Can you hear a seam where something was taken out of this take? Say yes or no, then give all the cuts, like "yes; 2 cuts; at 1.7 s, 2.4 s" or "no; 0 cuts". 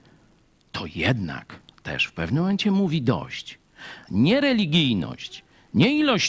yes; 1 cut; at 4.0 s